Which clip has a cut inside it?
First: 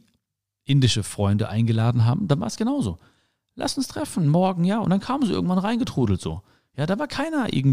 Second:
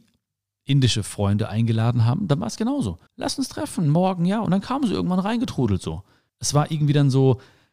second; 2 cuts; at 3.1 s, 6.3 s

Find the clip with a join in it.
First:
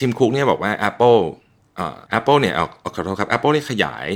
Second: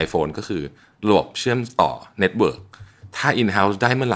first; 1 cut; at 2.1 s

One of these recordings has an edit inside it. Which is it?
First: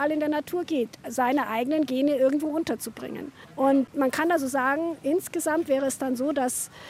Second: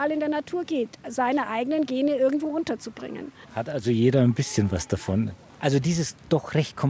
second; 1 cut; at 3.5 s

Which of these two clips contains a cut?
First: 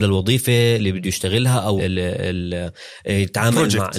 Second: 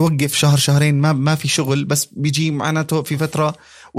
first; 1 cut; at 1.8 s

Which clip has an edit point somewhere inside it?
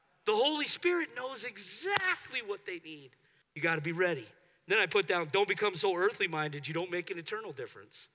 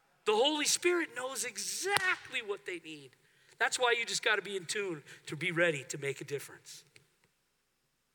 first; 1 cut; at 3.4 s

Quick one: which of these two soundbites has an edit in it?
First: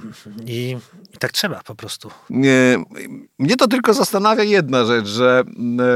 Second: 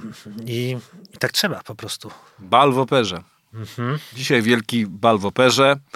first; 1 cut; at 2.3 s

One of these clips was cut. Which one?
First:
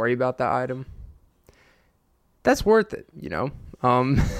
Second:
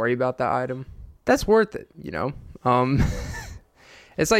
second; 1 cut; at 1.2 s

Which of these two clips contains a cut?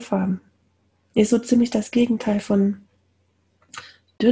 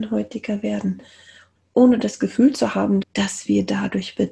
second; 2 cuts; at 1.6 s, 3.0 s

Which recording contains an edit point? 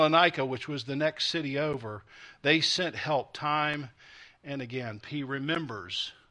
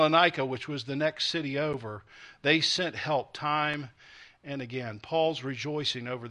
first; 1 cut; at 5.0 s

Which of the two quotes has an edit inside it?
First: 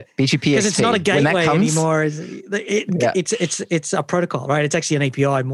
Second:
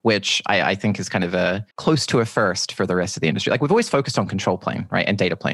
second; 1 cut; at 1.7 s

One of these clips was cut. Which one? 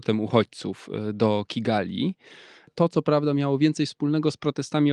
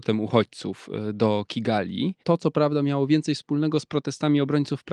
second; 1 cut; at 2.2 s

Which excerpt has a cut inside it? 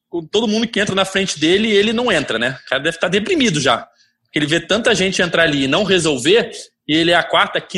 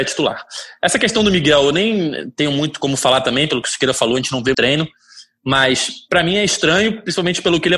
second; 1 cut; at 4.5 s

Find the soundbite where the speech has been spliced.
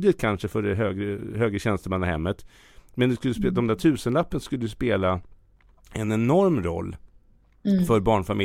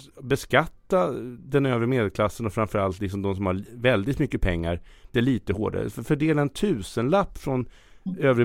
second; 1 cut; at 5.1 s

